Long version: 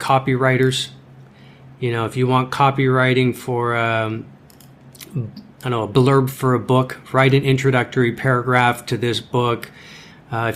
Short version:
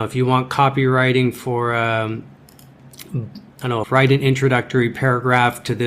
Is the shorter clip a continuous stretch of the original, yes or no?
no